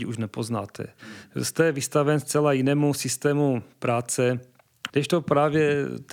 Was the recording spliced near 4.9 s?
yes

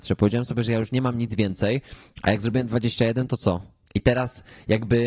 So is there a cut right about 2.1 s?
no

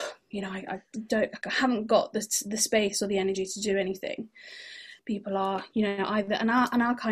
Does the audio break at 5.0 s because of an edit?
yes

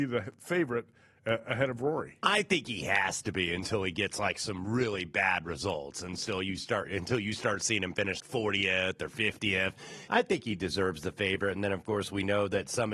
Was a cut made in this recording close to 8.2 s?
yes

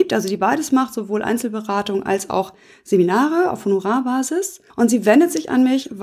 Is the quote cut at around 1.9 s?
no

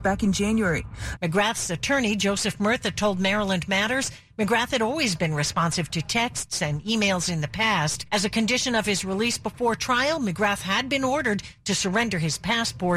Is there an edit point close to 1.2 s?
yes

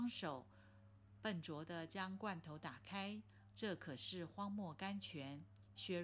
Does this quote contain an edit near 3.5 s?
yes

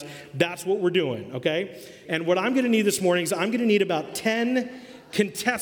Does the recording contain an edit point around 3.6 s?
no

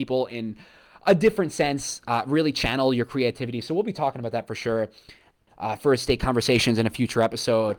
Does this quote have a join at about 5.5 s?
yes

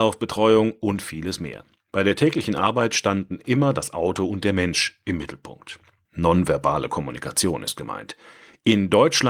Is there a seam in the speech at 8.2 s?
no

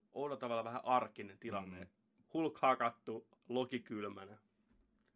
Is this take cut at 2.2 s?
yes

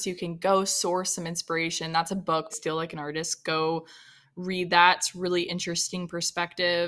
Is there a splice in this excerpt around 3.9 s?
no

